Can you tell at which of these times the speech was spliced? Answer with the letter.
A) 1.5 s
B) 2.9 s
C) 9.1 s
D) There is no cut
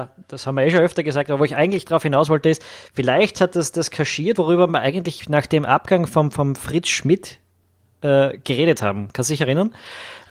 D